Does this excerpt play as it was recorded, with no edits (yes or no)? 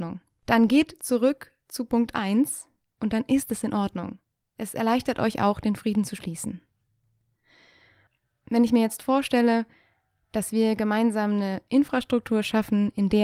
yes